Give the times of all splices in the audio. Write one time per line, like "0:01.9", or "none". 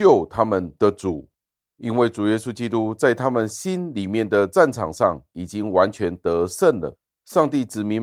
none